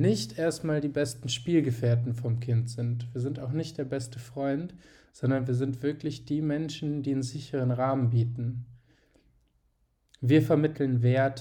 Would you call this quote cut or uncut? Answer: cut